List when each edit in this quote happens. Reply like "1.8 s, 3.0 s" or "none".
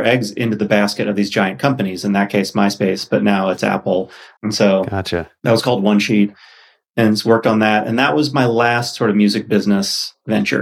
4.4 s